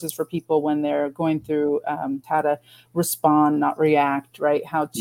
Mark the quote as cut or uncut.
cut